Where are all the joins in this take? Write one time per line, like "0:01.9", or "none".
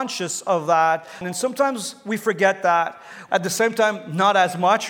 0:01.2
0:03.3